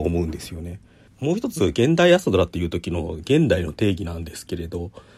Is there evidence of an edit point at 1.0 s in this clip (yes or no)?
no